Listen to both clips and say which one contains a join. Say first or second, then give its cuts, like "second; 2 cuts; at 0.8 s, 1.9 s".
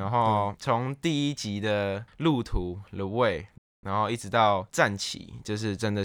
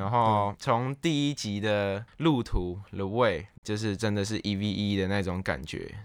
second; 1 cut; at 3.6 s